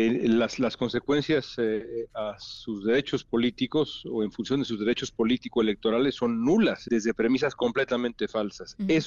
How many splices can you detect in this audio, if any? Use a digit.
1